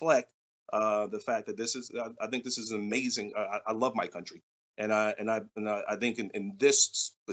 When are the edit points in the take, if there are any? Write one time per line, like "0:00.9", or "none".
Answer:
none